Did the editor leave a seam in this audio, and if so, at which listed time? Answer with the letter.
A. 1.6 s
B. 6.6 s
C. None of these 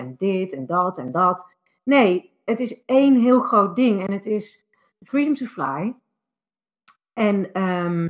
C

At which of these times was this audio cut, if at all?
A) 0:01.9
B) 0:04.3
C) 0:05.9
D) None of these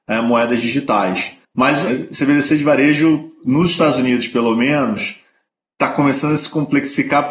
A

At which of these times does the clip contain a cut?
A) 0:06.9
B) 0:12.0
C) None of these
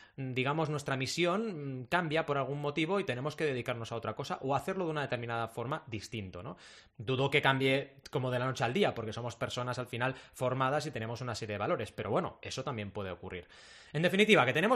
C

